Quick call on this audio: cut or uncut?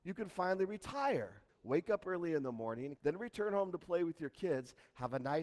cut